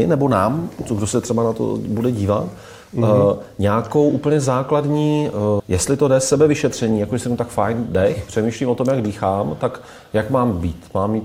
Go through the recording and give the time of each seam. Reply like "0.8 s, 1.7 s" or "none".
5.6 s